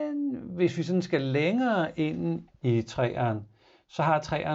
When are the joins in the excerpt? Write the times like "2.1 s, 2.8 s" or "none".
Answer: 2.5 s